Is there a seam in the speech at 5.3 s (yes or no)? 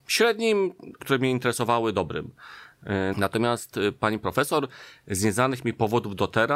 no